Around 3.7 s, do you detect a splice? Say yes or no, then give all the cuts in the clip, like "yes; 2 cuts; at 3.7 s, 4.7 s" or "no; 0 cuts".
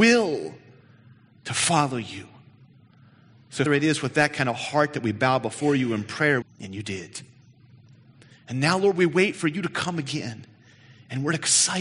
yes; 2 cuts; at 3.7 s, 6.4 s